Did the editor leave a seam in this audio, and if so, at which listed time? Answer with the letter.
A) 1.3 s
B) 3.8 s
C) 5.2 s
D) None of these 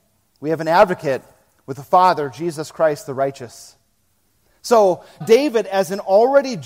C